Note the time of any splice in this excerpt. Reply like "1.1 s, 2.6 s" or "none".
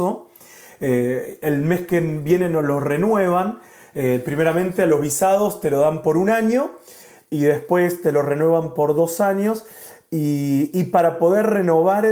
none

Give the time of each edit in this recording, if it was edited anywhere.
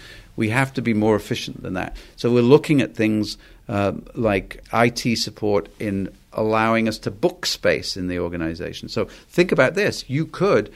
4.6 s

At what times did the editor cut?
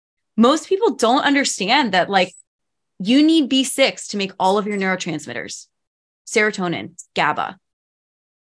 7.1 s

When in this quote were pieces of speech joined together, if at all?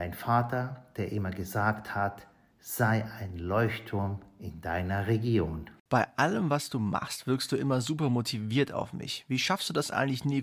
none

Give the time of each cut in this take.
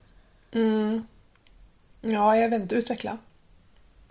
none

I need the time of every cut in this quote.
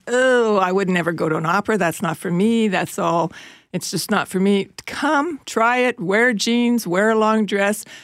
none

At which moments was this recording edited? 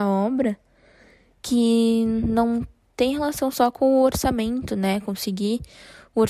none

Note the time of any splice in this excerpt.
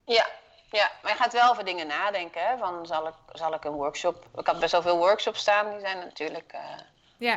none

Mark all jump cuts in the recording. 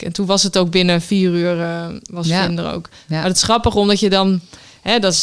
none

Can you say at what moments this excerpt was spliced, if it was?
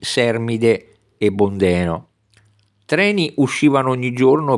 none

